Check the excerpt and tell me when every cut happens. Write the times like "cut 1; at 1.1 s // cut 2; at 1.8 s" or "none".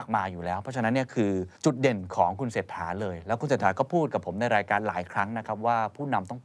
cut 1; at 1.6 s